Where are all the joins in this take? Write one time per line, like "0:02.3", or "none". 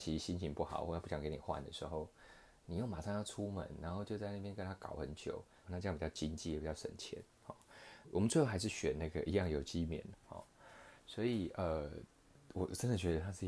0:05.6
0:08.0
0:10.1